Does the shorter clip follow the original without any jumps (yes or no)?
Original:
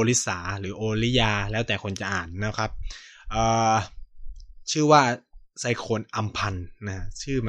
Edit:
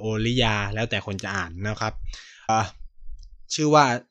no